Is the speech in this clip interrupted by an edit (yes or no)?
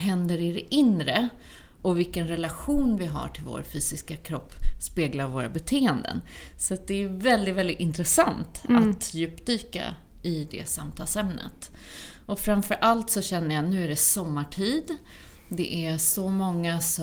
yes